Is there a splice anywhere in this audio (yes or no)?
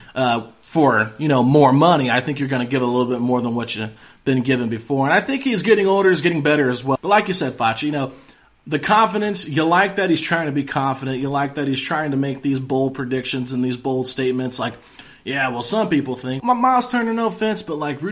yes